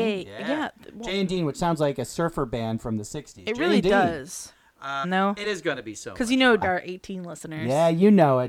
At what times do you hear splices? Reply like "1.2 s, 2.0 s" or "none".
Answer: 5.0 s, 6.6 s